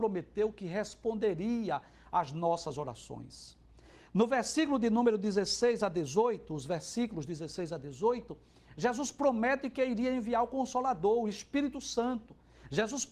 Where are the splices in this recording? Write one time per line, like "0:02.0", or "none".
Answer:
none

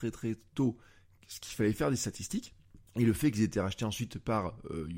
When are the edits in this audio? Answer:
0:02.9

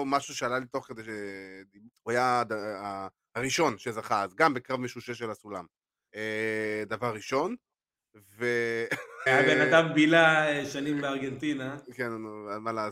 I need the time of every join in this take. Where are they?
0:01.9
0:06.1
0:09.3

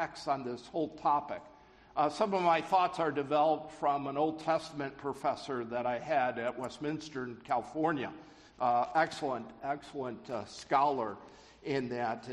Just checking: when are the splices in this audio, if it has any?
none

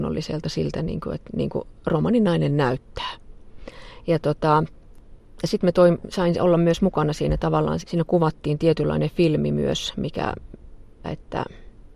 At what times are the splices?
0:07.8
0:11.0

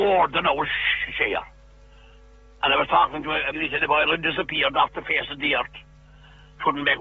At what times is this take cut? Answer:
0:03.5

